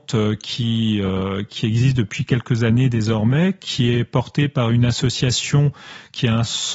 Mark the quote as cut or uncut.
uncut